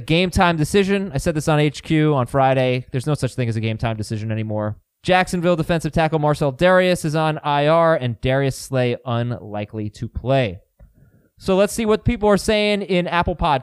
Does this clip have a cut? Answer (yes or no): yes